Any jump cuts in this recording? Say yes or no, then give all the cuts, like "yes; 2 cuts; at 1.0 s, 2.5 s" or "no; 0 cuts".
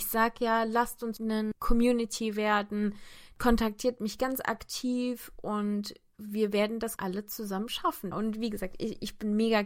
yes; 2 cuts; at 7.0 s, 8.1 s